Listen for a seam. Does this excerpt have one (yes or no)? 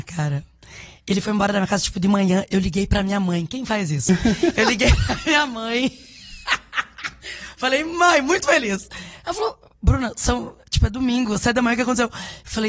no